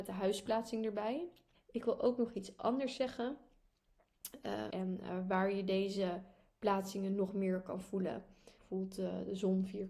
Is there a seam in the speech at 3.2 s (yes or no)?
no